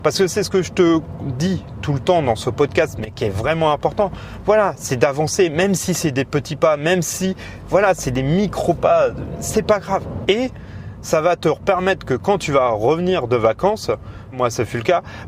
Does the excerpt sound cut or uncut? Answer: cut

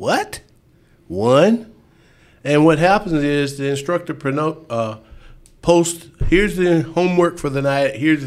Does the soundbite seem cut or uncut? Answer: uncut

